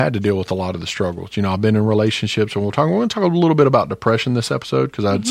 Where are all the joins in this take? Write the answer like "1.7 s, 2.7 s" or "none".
none